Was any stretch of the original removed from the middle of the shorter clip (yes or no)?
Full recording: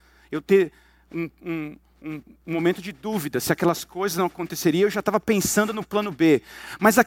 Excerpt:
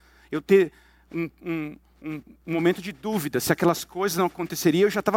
no